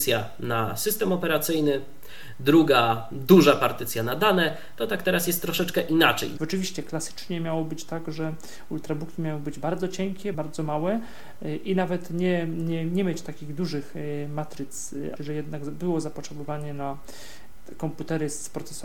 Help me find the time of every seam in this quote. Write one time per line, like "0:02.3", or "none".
0:06.4
0:10.3
0:15.2